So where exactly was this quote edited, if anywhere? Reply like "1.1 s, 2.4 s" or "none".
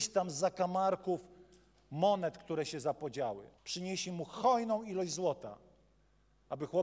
3.6 s